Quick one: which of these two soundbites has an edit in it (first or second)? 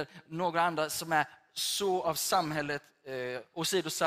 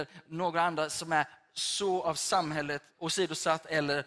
second